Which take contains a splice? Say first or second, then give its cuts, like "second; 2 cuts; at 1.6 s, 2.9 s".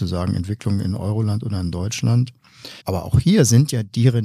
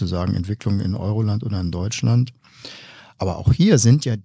first; 1 cut; at 2.8 s